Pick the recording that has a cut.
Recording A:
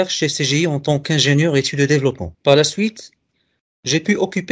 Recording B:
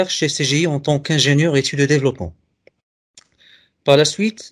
A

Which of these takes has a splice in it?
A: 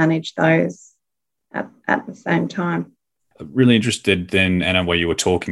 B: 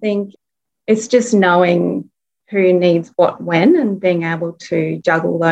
A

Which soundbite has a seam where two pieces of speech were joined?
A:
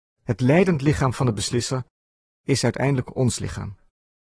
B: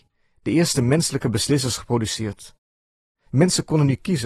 B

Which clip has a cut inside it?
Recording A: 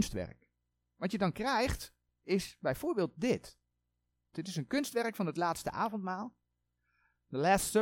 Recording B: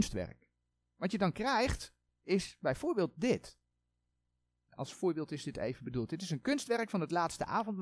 A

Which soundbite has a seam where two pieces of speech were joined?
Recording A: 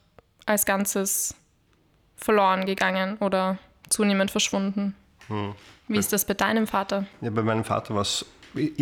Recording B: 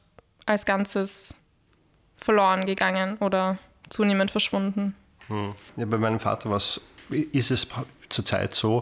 B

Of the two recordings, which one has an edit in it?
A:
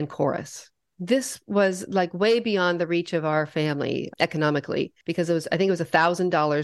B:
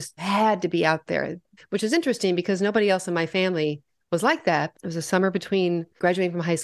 B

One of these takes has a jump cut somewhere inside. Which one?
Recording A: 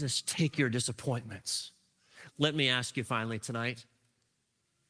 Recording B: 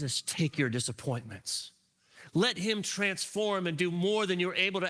A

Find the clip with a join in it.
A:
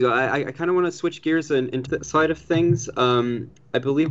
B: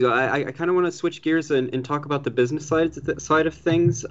A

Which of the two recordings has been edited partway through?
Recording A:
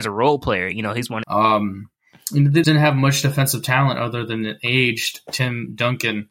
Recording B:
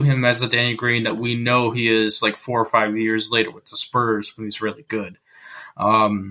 A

